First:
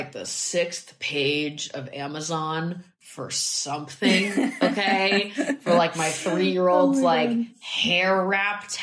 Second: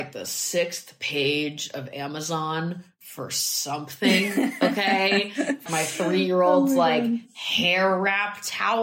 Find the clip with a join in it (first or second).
second